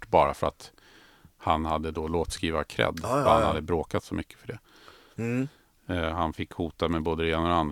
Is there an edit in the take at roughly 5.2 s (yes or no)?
yes